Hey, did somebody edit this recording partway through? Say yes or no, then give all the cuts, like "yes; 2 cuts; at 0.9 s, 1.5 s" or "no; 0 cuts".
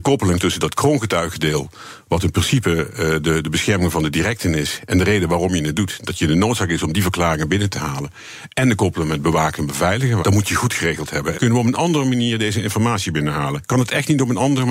yes; 2 cuts; at 10.2 s, 11.3 s